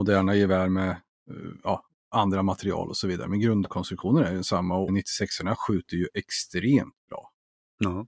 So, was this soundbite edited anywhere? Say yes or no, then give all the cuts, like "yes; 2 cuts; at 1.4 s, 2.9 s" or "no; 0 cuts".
yes; 1 cut; at 4.9 s